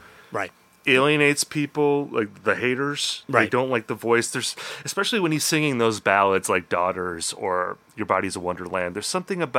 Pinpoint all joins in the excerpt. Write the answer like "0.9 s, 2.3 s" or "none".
none